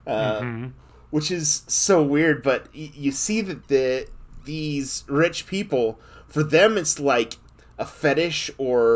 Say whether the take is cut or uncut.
uncut